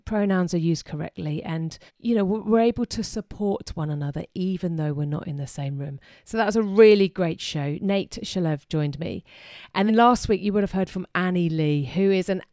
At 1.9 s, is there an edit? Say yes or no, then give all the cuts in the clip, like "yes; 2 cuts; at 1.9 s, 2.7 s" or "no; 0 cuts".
yes; 2 cuts; at 1.9 s, 9.9 s